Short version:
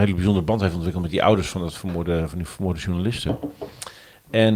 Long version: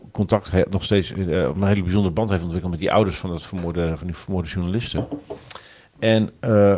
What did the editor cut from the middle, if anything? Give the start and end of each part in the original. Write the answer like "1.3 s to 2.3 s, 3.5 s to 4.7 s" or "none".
none